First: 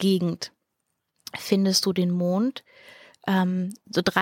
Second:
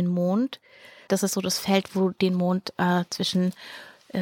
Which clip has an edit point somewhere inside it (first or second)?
second